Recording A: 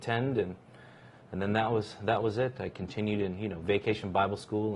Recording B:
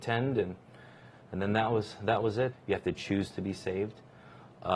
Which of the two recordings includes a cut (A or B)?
B